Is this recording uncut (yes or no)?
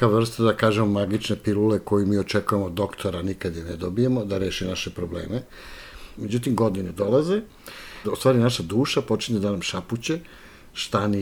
no